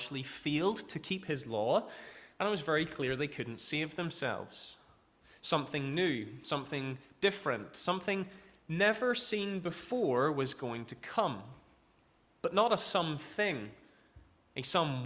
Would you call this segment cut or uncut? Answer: uncut